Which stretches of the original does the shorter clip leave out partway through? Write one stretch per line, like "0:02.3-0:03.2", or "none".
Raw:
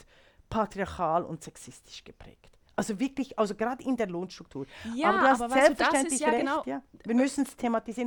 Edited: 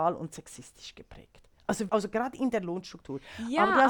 0:03.0-0:03.4